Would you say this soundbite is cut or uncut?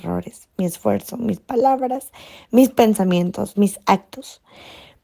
cut